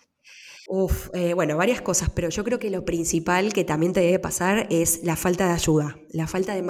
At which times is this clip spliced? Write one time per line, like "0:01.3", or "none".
none

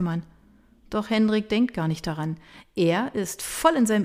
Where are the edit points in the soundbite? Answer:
none

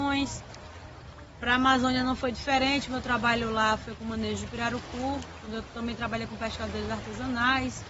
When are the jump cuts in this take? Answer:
none

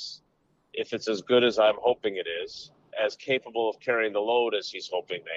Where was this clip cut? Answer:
0:02.9

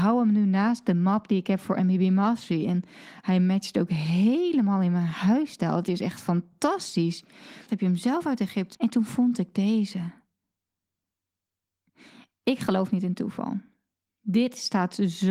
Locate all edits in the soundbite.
0:07.7
0:08.7

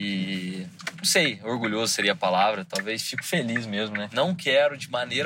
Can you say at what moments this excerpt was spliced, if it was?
0:04.1

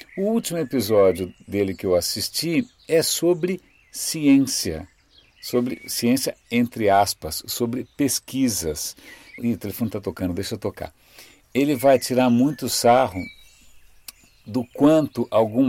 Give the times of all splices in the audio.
0:09.4

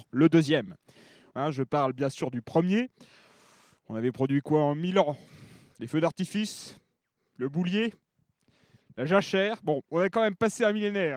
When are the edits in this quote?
0:01.3

